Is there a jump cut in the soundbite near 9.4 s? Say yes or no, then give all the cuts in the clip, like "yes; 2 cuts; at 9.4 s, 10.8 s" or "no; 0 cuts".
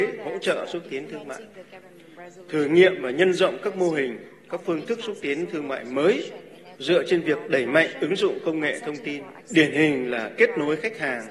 yes; 1 cut; at 9.4 s